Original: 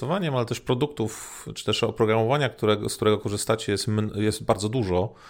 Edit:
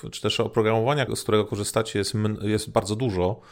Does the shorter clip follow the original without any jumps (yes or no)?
no